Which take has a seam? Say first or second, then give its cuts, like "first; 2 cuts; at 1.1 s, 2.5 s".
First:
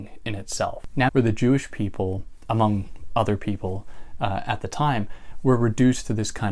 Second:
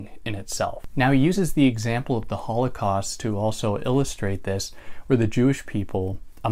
first; 1 cut; at 1.1 s